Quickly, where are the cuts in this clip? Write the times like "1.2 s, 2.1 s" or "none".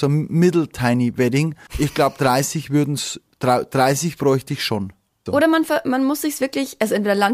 1.7 s, 5.3 s